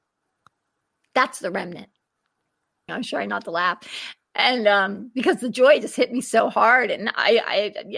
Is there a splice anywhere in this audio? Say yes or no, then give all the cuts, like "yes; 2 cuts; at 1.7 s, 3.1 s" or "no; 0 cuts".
yes; 1 cut; at 2.9 s